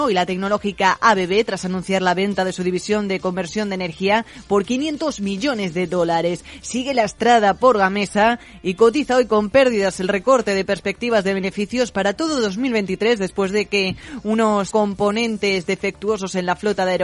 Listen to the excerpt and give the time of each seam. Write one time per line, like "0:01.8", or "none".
0:06.6
0:14.7